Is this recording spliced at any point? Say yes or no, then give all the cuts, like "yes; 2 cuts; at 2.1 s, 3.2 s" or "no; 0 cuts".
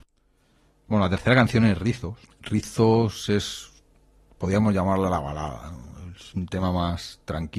no; 0 cuts